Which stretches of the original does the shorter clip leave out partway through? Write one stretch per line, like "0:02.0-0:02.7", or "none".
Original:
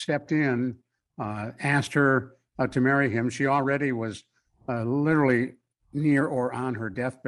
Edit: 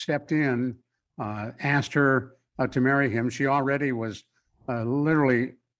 none